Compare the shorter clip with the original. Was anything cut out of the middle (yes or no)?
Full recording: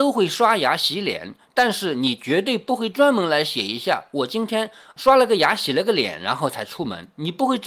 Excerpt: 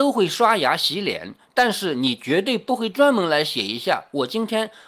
no